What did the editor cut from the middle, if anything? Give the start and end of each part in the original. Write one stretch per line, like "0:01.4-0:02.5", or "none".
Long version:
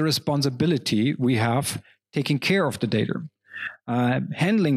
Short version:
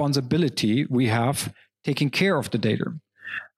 none